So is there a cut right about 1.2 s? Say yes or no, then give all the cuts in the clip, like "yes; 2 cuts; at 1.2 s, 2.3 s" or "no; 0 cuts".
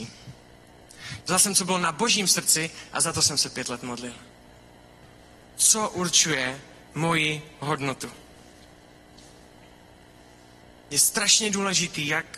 yes; 1 cut; at 1.2 s